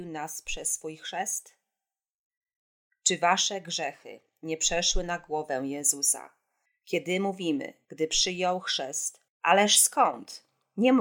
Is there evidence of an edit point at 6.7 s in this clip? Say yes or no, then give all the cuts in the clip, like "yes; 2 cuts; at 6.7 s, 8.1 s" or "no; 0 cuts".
yes; 3 cuts; at 6.7 s, 7.8 s, 9.3 s